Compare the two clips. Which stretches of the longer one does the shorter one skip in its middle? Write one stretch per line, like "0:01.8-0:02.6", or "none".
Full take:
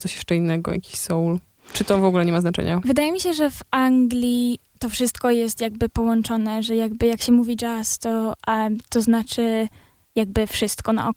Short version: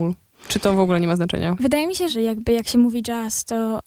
0:03.3-0:06.6